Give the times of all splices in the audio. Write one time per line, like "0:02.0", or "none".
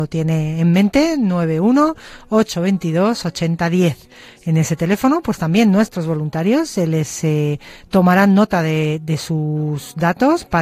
none